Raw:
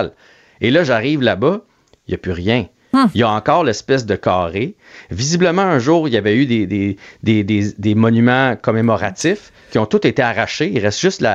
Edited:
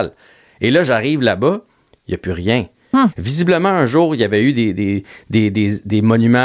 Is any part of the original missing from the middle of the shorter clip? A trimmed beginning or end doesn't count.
yes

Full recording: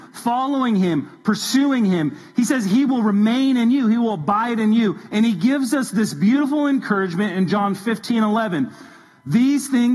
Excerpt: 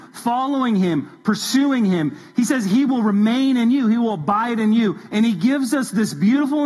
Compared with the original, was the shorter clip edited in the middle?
no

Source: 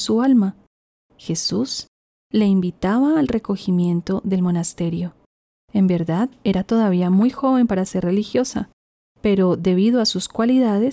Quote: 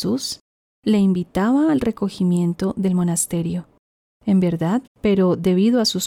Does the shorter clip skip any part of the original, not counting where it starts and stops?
yes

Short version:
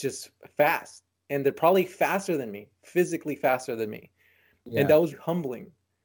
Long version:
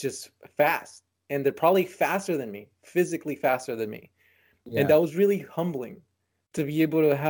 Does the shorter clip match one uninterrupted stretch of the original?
no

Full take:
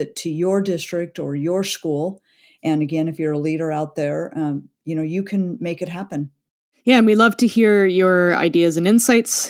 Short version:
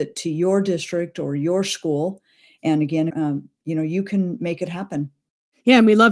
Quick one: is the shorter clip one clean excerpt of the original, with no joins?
no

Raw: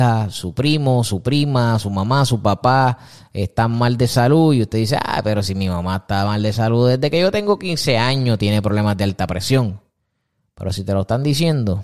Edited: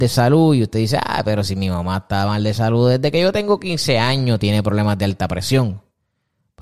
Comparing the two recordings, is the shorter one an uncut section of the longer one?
yes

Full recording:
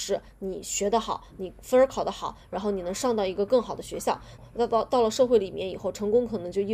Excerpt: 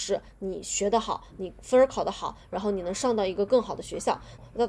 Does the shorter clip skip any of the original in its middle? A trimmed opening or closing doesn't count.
no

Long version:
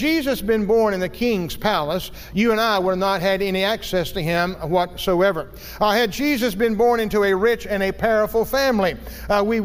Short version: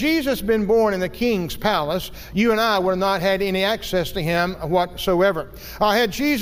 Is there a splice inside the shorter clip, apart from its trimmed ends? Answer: no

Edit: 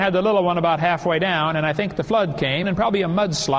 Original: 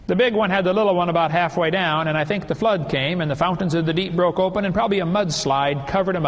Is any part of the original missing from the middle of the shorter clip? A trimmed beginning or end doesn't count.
yes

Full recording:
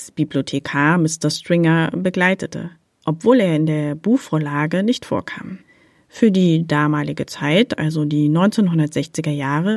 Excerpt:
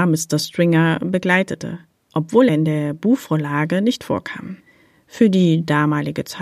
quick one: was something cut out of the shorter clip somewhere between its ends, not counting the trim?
yes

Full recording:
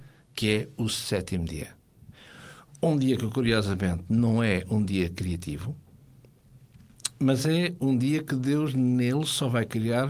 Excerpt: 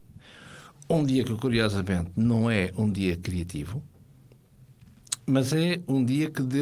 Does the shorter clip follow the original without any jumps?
yes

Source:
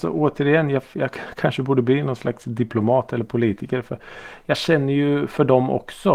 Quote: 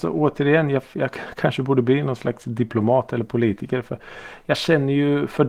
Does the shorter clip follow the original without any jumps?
yes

